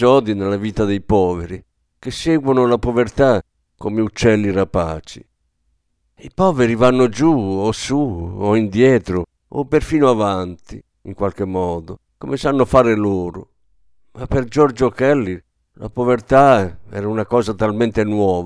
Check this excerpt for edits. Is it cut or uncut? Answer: uncut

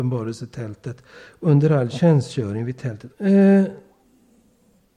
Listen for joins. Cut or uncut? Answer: cut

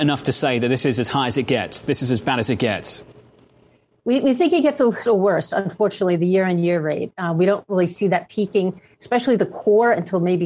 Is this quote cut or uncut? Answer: uncut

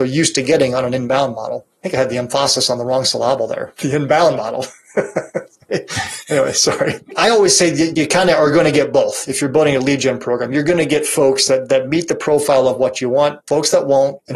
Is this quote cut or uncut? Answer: uncut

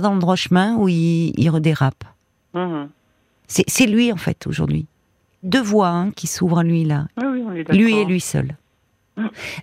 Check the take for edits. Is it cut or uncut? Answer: cut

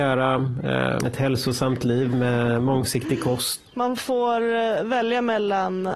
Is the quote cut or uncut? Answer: cut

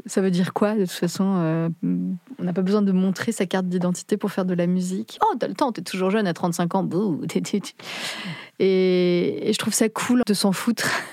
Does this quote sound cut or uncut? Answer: cut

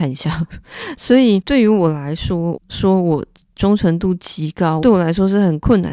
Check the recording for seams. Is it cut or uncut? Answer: cut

